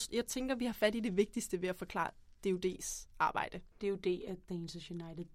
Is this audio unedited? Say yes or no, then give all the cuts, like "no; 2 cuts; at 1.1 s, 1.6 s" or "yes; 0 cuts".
no; 1 cut; at 3.7 s